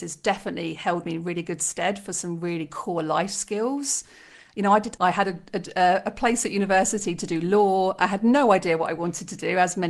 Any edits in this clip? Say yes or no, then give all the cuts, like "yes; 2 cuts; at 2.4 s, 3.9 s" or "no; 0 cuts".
yes; 1 cut; at 5.0 s